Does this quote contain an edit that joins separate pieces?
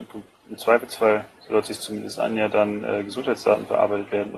no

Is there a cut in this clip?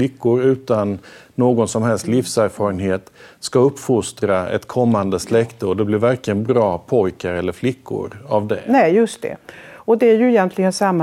no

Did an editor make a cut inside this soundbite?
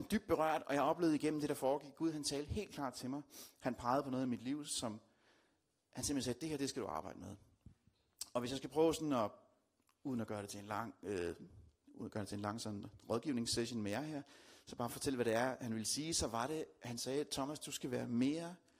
no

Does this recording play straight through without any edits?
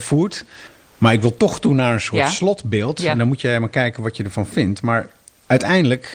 yes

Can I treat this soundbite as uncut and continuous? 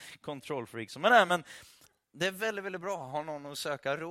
yes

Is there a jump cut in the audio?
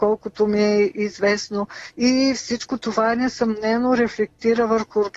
no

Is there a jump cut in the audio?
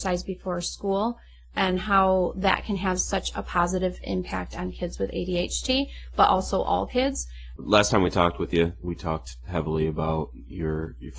yes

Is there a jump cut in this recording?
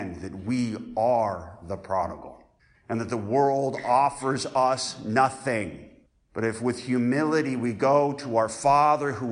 yes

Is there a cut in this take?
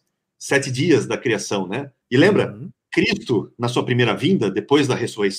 yes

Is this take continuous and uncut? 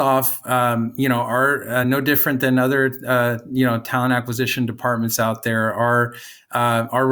yes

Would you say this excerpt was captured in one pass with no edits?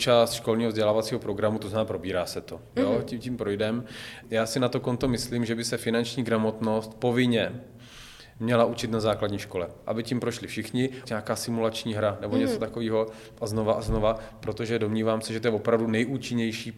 no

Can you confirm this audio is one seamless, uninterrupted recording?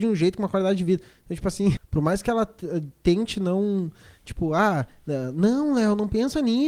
no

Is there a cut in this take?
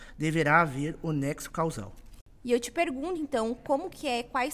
no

